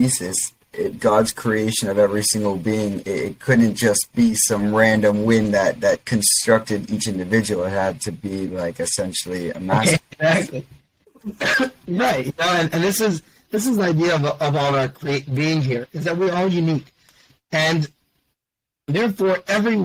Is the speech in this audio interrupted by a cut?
no; 0 cuts

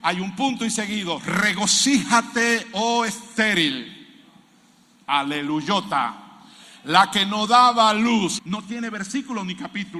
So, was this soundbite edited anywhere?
yes; 1 cut; at 8.4 s

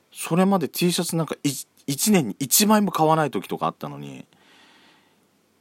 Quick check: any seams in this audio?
no; 0 cuts

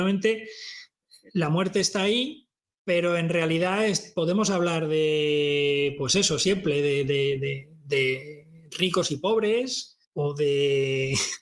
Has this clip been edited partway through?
yes; 1 cut; at 10.0 s

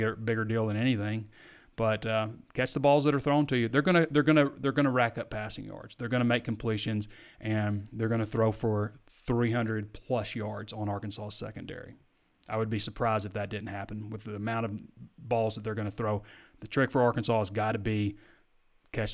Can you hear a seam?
no; 0 cuts

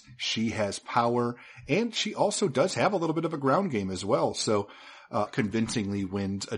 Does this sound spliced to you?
yes; 1 cut; at 5.3 s

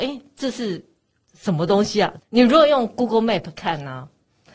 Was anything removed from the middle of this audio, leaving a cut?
yes; 1 cut; at 2.2 s

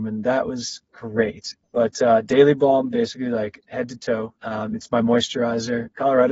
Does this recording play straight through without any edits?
no; 2 cuts; at 1.6 s, 4.4 s

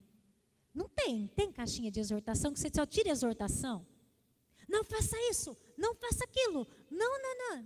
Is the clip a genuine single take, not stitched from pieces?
yes; 0 cuts

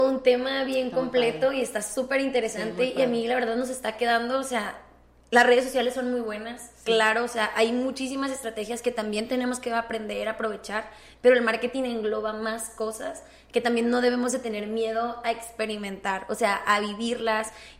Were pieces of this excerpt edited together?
no; 0 cuts

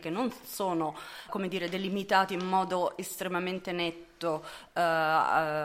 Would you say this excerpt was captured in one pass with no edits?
no; 1 cut; at 1.3 s

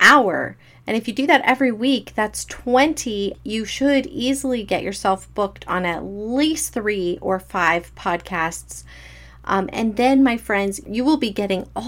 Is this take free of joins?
yes; 0 cuts

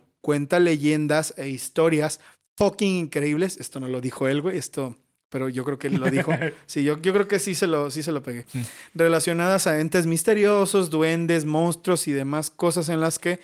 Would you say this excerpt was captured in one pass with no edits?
yes; 0 cuts

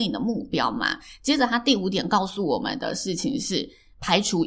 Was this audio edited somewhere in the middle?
no; 0 cuts

